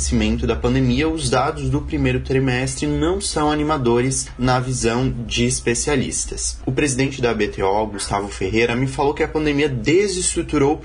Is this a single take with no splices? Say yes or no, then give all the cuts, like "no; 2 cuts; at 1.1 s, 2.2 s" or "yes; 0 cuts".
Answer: yes; 0 cuts